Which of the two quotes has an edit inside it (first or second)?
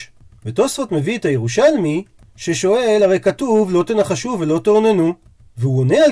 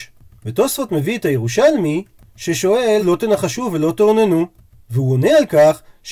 second